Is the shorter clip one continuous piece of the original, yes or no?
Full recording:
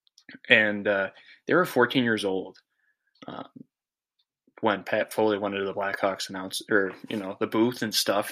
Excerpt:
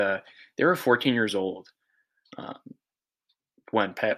yes